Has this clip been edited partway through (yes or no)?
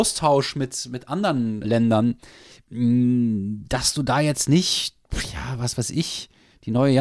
yes